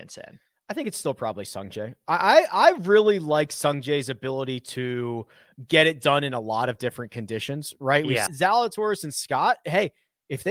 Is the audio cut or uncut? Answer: cut